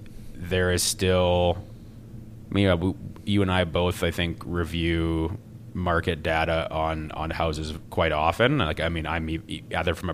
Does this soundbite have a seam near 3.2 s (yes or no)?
no